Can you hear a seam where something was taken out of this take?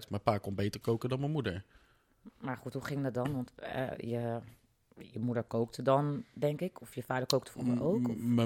no; 0 cuts

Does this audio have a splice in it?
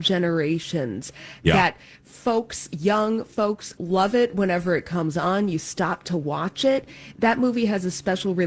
yes; 1 cut; at 3.8 s

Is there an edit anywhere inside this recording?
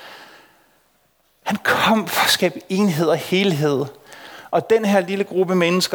no; 0 cuts

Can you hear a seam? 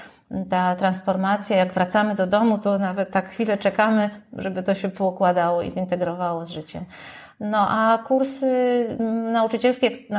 no; 0 cuts

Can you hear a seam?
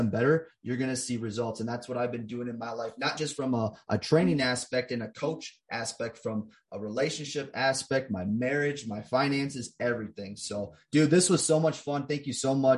no; 0 cuts

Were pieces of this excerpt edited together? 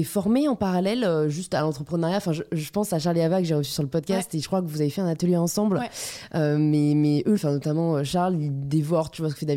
yes; 1 cut; at 7.4 s

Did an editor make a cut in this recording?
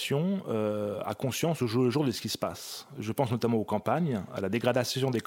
yes; 1 cut; at 1.0 s

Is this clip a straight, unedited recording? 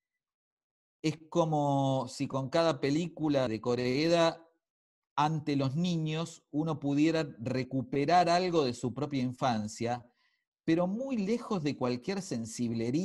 no; 1 cut; at 3.5 s

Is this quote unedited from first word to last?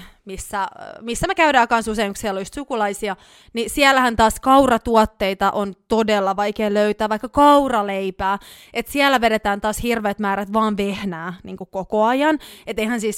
yes; 0 cuts

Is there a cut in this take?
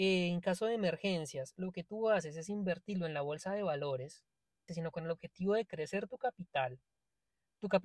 yes; 1 cut; at 4.7 s

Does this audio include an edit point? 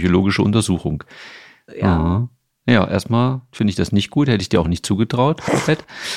yes; 1 cut; at 1.7 s

